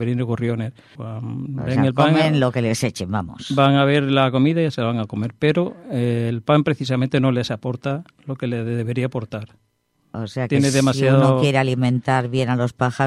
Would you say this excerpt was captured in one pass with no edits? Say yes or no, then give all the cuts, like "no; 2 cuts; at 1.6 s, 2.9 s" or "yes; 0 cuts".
no; 1 cut; at 1.0 s